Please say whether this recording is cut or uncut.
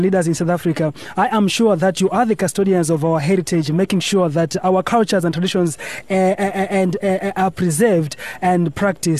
uncut